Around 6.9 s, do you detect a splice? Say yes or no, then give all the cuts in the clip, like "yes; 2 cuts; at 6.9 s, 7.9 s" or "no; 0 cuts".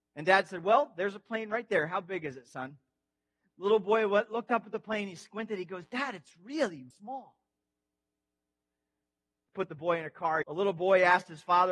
yes; 2 cuts; at 6.9 s, 10.4 s